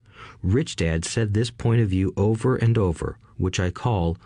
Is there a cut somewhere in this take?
no; 0 cuts

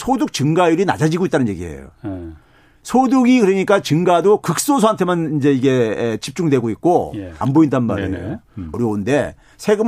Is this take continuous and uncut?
no; 2 cuts; at 7.4 s, 8.7 s

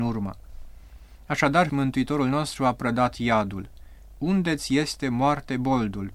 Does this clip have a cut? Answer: yes; 1 cut; at 1.7 s

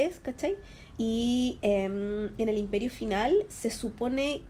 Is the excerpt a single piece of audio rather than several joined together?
no; 2 cuts; at 0.9 s, 3.5 s

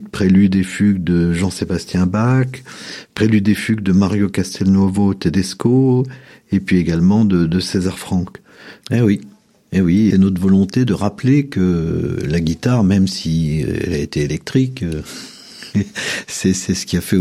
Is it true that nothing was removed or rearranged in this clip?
no; 2 cuts; at 8.8 s, 10.1 s

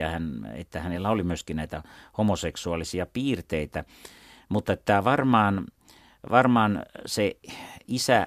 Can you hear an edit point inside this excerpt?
no; 0 cuts

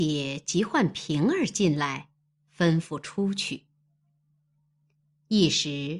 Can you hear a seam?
no; 0 cuts

